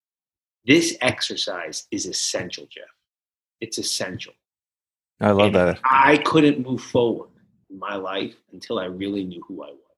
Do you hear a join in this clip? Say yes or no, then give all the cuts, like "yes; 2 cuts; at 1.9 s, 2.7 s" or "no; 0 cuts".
no; 0 cuts